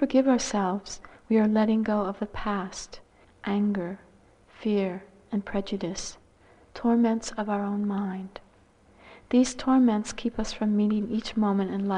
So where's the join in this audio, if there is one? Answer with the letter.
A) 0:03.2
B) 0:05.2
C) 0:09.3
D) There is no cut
A